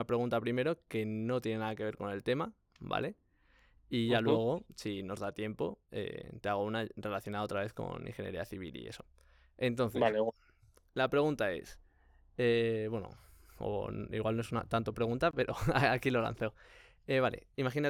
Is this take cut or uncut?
uncut